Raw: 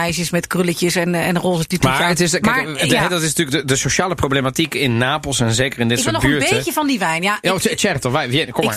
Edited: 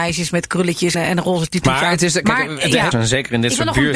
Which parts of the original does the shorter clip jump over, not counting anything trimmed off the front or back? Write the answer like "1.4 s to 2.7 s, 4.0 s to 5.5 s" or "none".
0.9 s to 1.1 s, 3.1 s to 5.4 s